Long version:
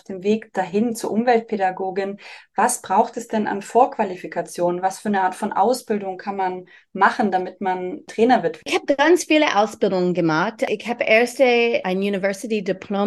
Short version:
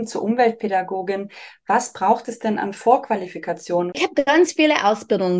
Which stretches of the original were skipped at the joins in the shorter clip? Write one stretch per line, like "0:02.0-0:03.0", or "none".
0:04.8-0:08.6